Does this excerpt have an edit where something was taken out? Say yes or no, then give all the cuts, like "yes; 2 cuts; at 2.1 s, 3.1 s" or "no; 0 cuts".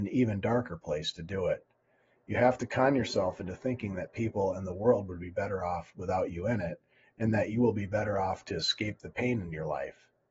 no; 0 cuts